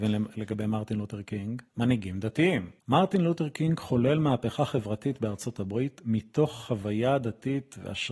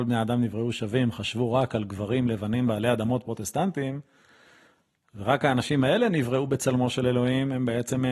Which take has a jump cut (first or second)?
first